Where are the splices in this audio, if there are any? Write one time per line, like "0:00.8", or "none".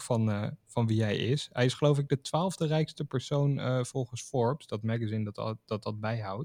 none